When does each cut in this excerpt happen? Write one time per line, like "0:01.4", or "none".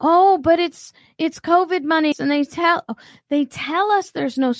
0:02.1